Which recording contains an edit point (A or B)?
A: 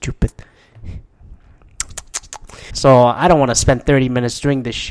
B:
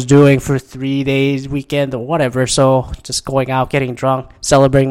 A